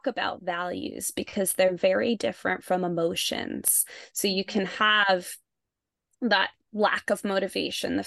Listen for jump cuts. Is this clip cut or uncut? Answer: uncut